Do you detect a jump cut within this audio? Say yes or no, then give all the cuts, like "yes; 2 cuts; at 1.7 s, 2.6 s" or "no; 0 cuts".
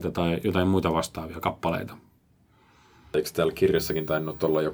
no; 0 cuts